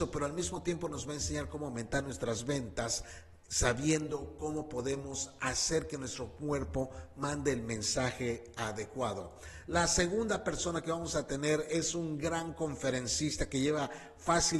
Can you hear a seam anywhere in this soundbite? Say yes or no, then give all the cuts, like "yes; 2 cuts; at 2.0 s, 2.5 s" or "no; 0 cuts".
no; 0 cuts